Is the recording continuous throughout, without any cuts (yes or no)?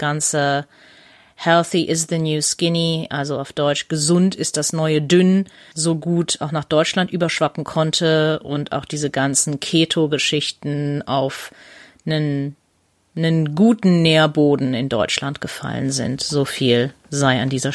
yes